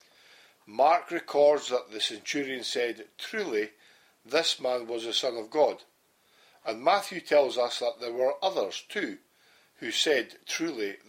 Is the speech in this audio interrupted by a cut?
no; 0 cuts

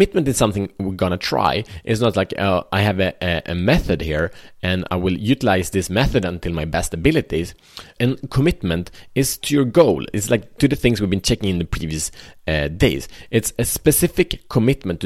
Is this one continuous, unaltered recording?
no; 1 cut; at 8.0 s

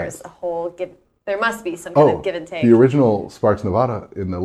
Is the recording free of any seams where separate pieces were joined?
yes; 0 cuts

